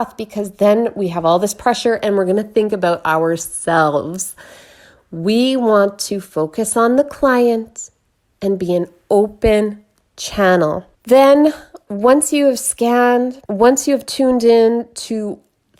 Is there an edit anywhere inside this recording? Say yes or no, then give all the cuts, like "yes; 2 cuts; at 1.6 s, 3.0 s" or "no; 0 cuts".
yes; 2 cuts; at 10.9 s, 13.5 s